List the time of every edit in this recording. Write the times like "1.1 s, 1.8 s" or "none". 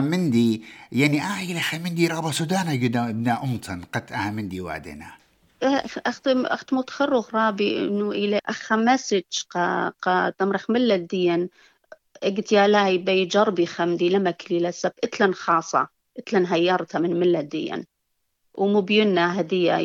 8.4 s